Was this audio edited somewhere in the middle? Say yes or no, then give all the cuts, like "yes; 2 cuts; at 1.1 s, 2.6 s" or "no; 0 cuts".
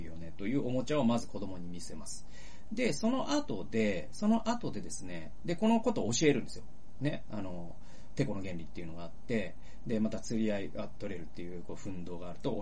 no; 0 cuts